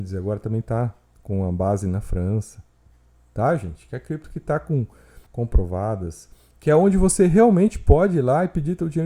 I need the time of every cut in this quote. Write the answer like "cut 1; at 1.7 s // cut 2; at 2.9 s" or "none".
cut 1; at 5.3 s